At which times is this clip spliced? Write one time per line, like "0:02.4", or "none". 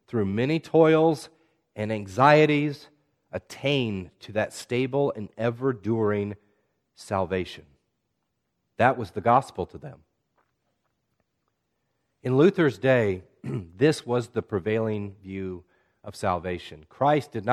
0:08.6